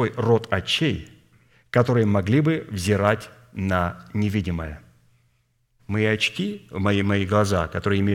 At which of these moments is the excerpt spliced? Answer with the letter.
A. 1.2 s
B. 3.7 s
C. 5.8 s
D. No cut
C